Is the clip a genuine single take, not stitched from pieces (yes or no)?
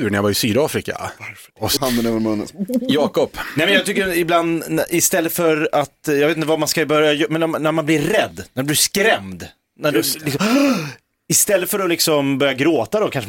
no